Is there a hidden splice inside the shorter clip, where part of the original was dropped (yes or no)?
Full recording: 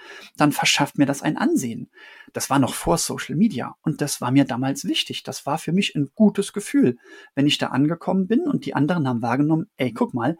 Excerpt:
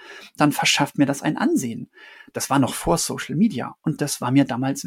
no